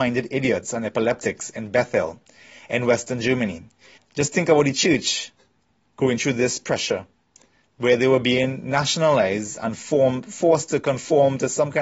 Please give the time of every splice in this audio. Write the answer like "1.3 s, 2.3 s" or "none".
4.0 s